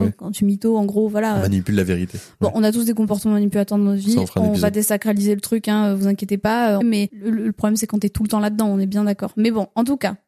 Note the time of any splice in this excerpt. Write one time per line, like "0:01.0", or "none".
0:06.8